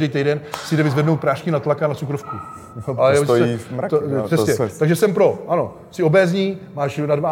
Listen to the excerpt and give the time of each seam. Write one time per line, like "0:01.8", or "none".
0:03.0